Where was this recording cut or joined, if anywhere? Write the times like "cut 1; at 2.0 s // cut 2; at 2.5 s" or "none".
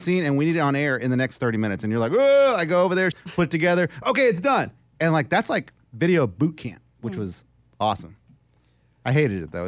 cut 1; at 3.1 s